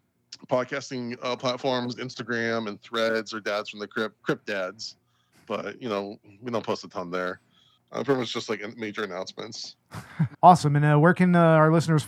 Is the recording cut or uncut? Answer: cut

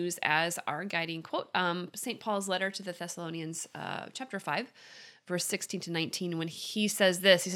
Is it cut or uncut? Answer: uncut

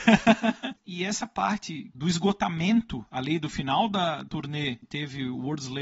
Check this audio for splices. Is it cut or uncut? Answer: uncut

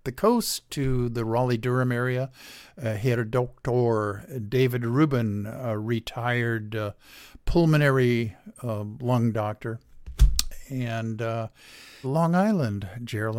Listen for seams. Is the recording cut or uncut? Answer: cut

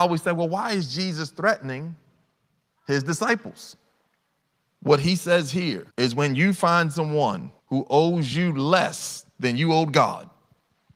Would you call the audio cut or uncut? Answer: cut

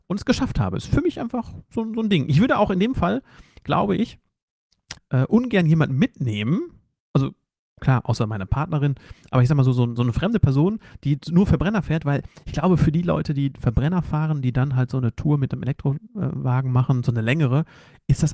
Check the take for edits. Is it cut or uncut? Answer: cut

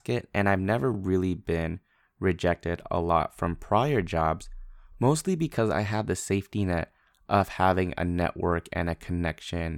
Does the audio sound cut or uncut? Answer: uncut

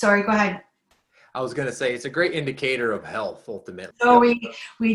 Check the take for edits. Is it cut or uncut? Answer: cut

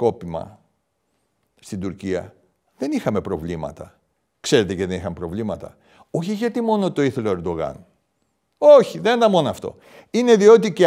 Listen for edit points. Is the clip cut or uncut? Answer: uncut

